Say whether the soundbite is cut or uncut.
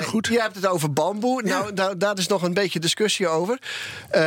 uncut